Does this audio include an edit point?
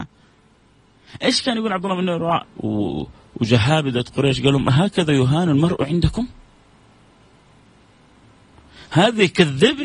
yes; 1 cut; at 2.4 s

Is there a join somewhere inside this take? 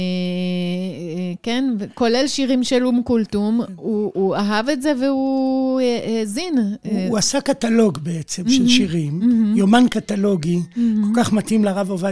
no; 0 cuts

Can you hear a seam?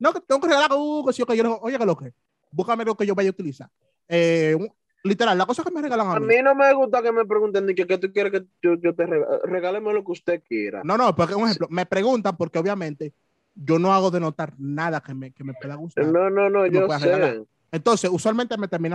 no; 0 cuts

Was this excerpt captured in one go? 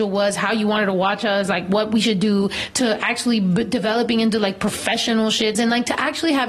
no; 1 cut; at 5.5 s

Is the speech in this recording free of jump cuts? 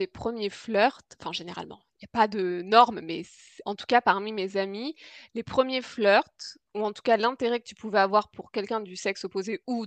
yes; 0 cuts

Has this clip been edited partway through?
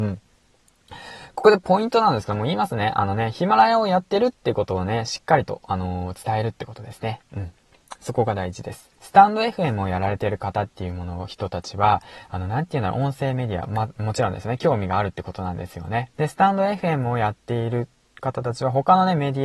yes; 2 cuts; at 9.0 s, 16.1 s

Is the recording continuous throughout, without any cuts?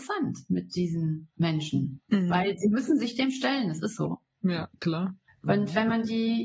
no; 1 cut; at 5.3 s

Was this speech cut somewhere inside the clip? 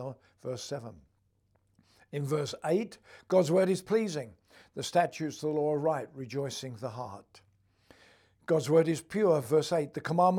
no; 0 cuts

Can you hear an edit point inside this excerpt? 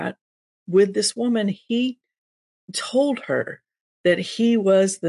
no; 0 cuts

